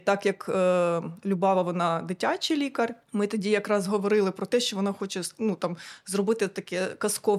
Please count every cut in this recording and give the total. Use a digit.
1